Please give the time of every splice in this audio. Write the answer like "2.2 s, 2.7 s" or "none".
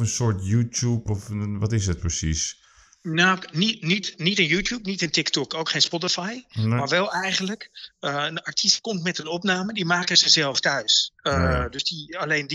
none